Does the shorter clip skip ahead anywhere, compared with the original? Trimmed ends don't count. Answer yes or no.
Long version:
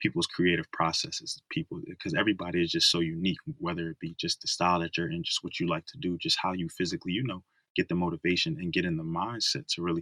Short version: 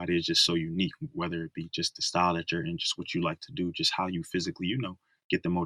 no